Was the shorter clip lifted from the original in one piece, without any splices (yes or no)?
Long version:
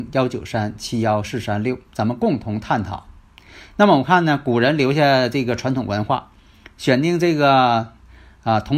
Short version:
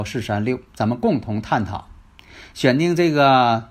no